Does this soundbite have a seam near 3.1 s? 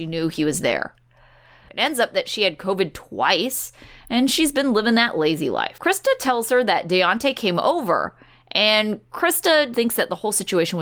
no; 3 cuts; at 1.7 s, 5.8 s, 9.7 s

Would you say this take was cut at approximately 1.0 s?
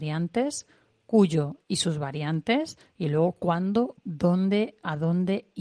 no; 1 cut; at 4.0 s

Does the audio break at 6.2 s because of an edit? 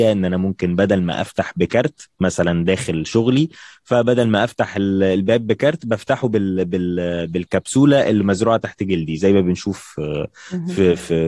no; 0 cuts

